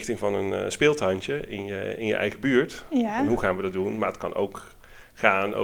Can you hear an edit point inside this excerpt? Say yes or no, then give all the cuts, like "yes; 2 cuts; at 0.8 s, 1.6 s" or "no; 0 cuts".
no; 0 cuts